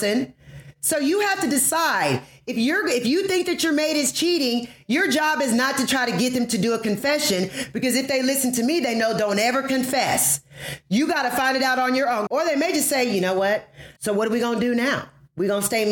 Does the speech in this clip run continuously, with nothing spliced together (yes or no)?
no